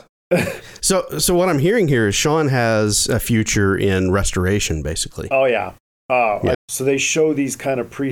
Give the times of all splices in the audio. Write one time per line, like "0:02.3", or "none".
0:06.5